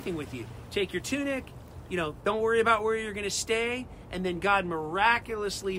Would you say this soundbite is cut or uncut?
cut